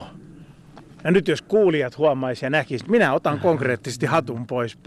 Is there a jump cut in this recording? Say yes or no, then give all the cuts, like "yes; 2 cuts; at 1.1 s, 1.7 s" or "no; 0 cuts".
yes; 1 cut; at 2.8 s